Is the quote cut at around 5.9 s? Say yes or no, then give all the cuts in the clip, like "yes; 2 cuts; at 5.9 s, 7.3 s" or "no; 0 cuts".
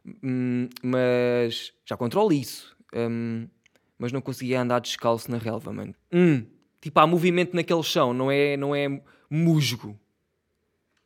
yes; 1 cut; at 5.9 s